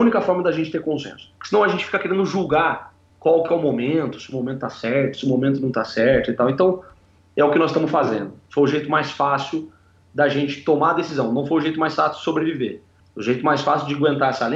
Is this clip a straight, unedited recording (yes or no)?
no